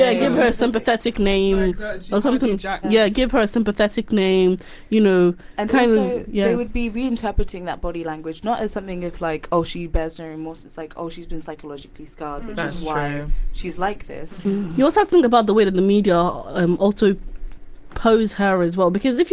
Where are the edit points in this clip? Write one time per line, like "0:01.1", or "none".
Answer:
0:02.8